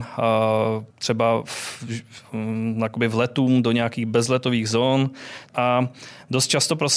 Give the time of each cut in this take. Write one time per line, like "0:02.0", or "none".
0:00.9
0:05.5